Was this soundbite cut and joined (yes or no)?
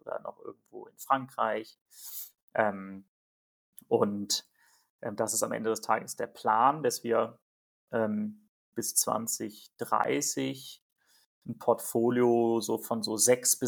no